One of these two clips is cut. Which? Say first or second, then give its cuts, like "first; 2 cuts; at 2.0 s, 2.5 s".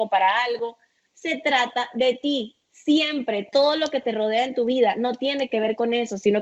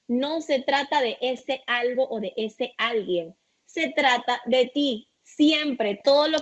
first; 1 cut; at 1.1 s